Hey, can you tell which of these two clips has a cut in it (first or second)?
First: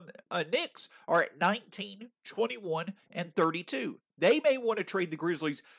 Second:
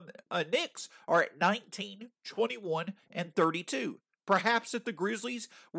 first